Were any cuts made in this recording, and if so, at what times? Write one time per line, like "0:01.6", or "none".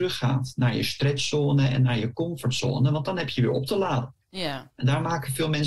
0:04.7